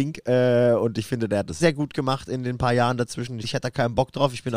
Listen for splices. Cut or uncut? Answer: cut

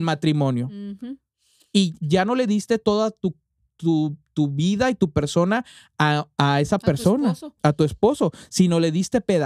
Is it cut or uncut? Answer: cut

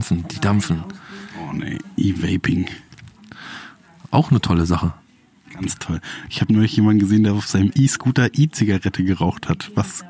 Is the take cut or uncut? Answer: uncut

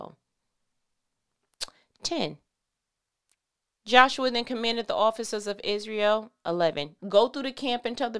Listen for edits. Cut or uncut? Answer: cut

